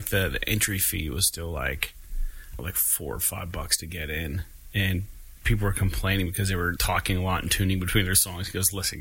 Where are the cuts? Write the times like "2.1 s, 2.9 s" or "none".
2.6 s, 6.8 s

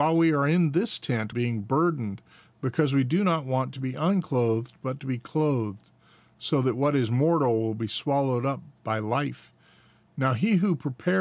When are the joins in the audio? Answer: 1.3 s

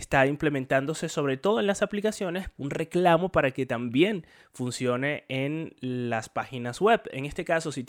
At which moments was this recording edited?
2.6 s

